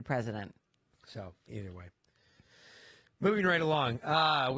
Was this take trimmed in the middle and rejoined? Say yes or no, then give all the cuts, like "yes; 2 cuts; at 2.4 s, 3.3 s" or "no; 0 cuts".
yes; 1 cut; at 1.5 s